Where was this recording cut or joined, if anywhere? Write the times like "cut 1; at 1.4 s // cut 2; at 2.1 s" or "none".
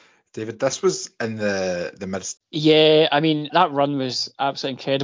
cut 1; at 2.4 s // cut 2; at 3.5 s